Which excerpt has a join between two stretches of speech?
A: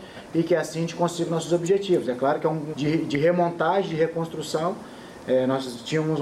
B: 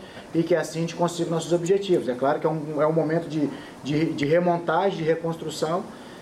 A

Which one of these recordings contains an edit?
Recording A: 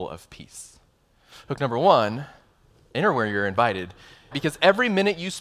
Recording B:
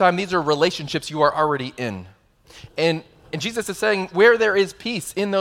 A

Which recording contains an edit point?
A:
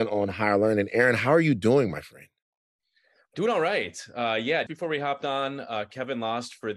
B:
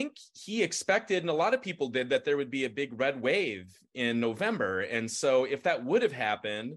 A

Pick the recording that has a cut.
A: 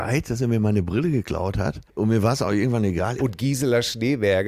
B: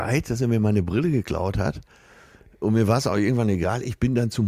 A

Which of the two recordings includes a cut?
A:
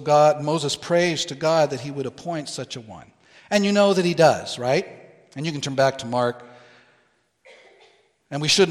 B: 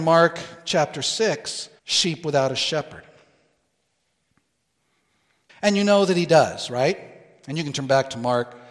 B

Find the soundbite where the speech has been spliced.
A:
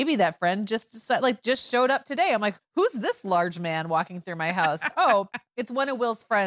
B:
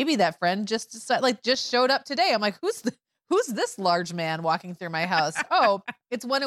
A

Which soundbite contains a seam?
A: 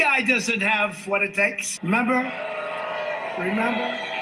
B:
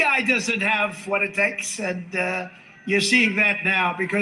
A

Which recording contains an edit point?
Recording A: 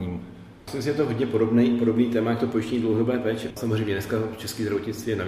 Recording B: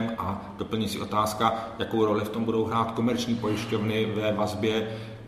A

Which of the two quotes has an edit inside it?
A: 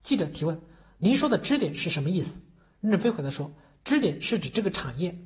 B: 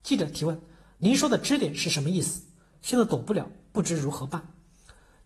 B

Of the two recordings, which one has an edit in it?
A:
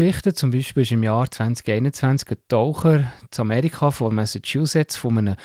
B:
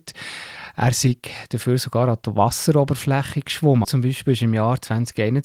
B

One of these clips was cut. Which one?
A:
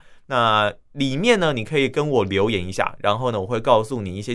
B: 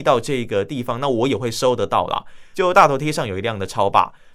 B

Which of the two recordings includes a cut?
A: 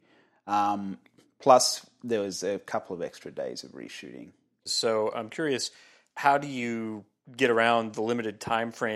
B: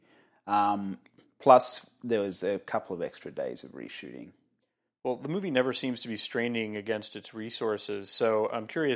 A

